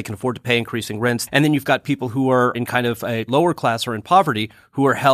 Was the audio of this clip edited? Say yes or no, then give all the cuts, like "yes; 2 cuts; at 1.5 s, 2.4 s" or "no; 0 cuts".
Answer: yes; 1 cut; at 1.3 s